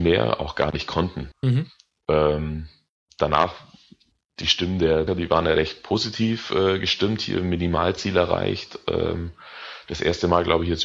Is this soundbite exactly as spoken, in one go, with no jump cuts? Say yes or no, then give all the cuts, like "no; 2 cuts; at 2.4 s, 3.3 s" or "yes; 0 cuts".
no; 2 cuts; at 1.3 s, 5.1 s